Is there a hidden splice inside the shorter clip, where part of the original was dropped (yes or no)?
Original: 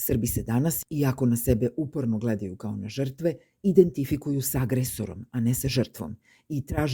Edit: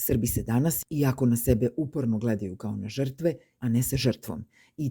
yes